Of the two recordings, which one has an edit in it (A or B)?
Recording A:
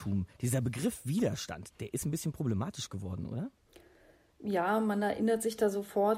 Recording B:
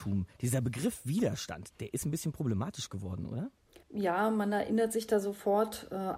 B